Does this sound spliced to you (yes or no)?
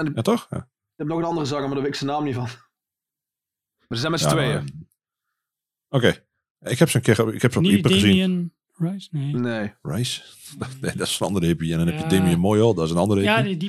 no